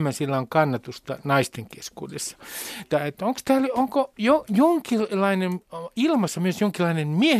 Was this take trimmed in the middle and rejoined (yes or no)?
yes